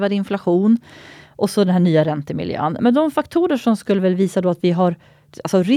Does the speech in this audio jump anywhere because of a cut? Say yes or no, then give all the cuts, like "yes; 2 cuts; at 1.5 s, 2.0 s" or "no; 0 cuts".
yes; 1 cut; at 2.8 s